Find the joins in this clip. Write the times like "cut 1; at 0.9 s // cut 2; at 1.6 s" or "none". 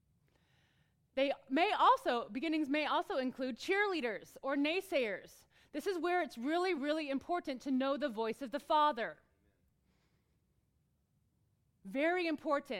cut 1; at 6.8 s

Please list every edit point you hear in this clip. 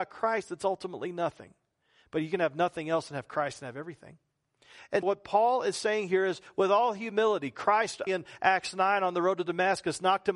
cut 1; at 5.0 s // cut 2; at 8.1 s

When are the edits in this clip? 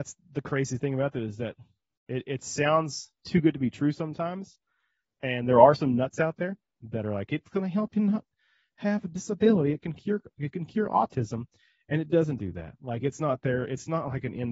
none

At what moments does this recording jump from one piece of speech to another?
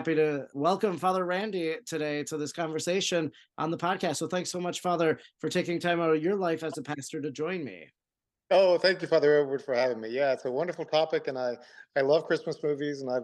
none

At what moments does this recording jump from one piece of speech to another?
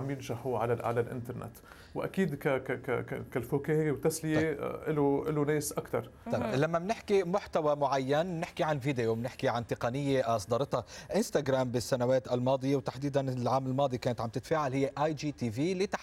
none

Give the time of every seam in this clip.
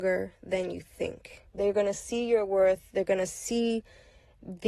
cut 1; at 1.5 s

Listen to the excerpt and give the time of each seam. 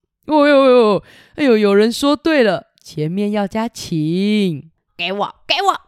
cut 1; at 4.9 s

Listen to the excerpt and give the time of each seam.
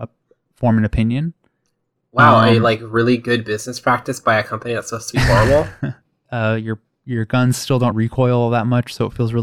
cut 1; at 6.3 s // cut 2; at 7.9 s

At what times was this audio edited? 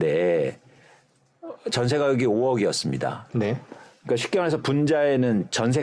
cut 1; at 3.3 s

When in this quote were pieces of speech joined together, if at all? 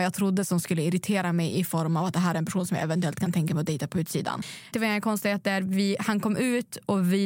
cut 1; at 4.7 s

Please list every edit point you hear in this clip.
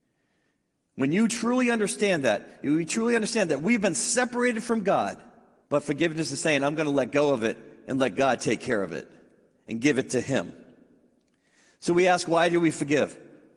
cut 1; at 5.6 s

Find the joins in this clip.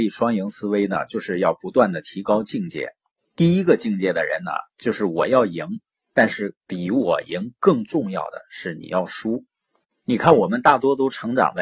none

